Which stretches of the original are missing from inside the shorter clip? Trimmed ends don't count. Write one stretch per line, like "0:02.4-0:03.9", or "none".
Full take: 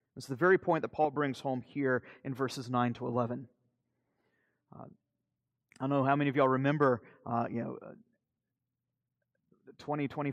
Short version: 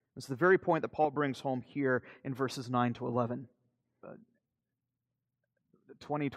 0:04.0-0:07.8